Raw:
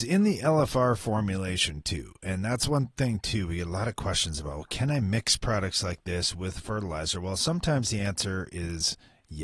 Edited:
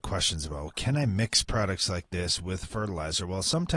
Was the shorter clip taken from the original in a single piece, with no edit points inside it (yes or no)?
yes